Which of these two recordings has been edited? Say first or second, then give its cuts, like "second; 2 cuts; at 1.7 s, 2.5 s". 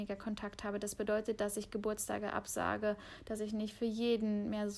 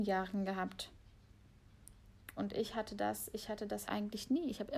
second; 2 cuts; at 2.4 s, 3.9 s